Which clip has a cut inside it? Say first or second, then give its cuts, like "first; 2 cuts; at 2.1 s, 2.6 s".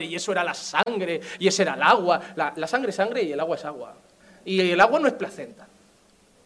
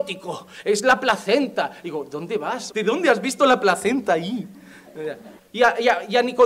second; 2 cuts; at 2.7 s, 5.4 s